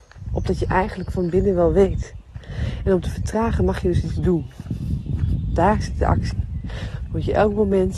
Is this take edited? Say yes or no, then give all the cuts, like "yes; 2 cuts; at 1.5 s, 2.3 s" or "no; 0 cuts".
no; 0 cuts